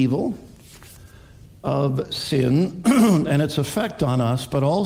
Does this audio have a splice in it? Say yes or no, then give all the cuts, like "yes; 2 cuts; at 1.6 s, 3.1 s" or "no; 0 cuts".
no; 0 cuts